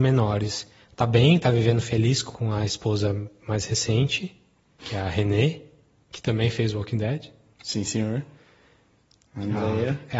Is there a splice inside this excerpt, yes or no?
no